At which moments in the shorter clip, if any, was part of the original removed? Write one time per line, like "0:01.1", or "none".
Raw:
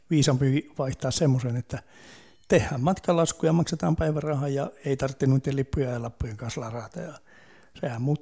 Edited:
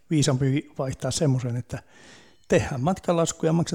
none